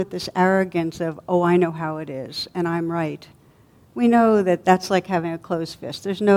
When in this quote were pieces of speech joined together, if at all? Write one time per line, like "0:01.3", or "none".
none